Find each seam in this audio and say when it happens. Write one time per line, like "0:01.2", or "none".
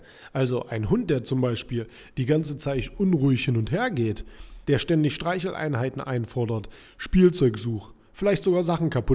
0:04.6